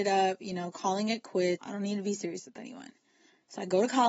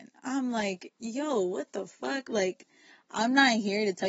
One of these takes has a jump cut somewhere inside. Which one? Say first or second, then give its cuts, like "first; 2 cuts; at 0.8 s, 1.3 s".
first; 1 cut; at 1.6 s